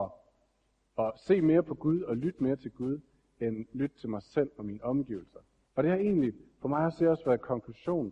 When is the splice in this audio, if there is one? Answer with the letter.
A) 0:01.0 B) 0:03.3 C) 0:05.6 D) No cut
C